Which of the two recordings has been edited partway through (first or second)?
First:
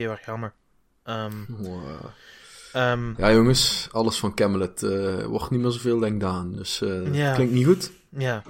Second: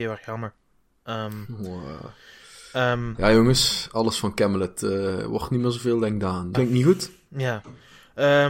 second